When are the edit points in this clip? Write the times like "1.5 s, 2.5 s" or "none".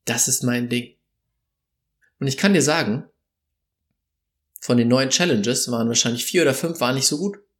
2.0 s